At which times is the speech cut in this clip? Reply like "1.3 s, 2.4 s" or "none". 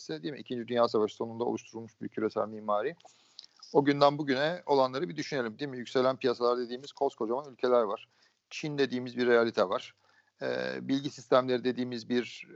none